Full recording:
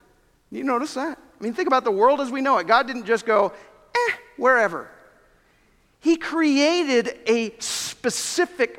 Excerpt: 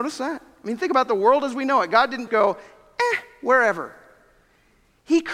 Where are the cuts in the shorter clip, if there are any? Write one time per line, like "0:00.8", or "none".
0:02.3